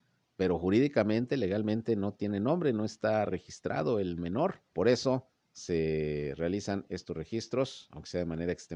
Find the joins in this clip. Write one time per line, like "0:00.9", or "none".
0:04.7